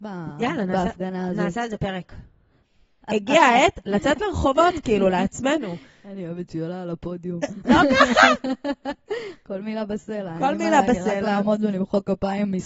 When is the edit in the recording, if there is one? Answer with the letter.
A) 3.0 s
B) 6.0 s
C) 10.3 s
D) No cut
A